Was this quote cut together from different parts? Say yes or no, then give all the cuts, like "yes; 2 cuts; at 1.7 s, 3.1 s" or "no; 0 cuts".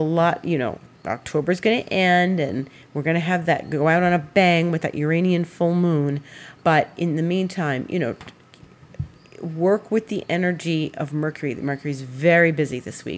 yes; 1 cut; at 6.6 s